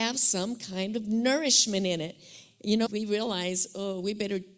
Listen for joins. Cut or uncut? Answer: cut